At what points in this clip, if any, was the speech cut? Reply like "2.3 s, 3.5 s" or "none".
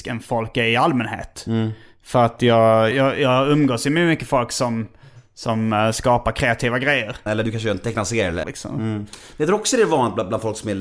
2.9 s, 7.3 s, 8.4 s